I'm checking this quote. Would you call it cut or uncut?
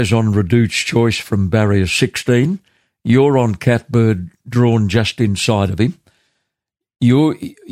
uncut